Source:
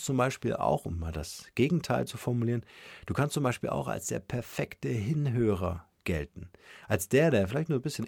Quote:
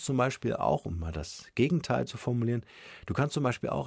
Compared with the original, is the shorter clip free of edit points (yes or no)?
yes